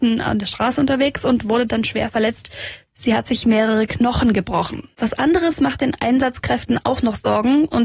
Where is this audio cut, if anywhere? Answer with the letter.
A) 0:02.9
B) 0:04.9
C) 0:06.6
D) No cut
B